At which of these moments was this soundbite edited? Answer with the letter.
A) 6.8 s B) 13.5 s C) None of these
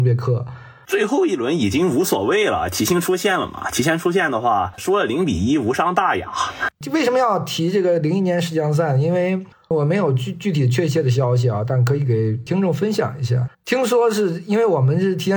B